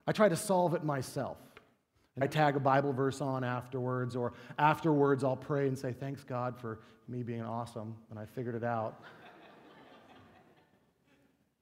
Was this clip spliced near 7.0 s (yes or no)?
yes